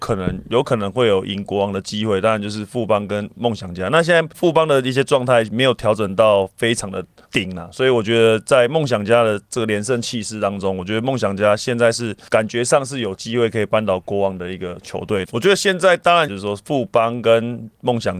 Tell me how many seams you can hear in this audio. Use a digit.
3